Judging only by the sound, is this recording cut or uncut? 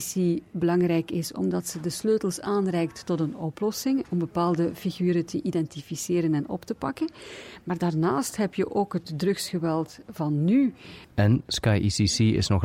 cut